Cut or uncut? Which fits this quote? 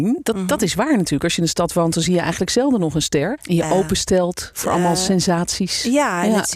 cut